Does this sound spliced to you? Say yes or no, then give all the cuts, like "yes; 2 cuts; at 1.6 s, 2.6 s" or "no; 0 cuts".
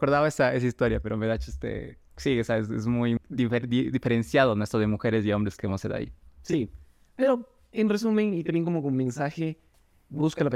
yes; 1 cut; at 3.2 s